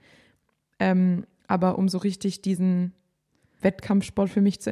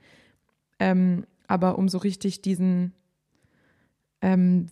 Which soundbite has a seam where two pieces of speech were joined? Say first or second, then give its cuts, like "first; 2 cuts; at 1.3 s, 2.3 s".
first; 1 cut; at 3.6 s